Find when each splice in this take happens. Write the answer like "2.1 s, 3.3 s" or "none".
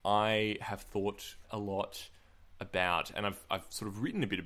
1.4 s